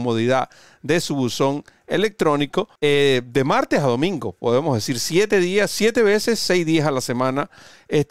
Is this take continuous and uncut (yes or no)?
no